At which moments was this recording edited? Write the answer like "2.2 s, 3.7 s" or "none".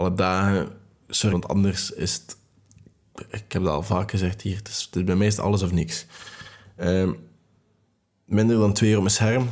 1.3 s